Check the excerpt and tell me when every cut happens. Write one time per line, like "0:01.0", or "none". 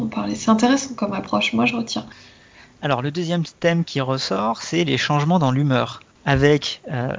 none